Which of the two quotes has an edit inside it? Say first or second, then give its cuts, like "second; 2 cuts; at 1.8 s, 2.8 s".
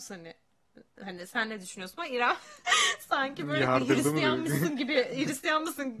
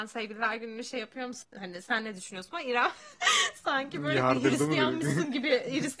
second; 1 cut; at 1.4 s